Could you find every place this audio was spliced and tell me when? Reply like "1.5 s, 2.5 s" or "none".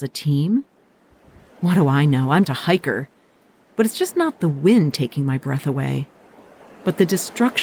2.4 s